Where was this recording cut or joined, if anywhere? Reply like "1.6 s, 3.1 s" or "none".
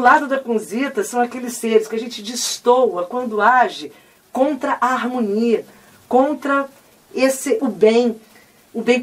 7.6 s